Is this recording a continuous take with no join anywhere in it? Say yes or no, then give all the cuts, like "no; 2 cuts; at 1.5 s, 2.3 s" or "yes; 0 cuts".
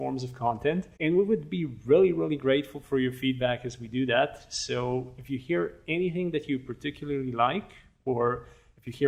no; 1 cut; at 0.9 s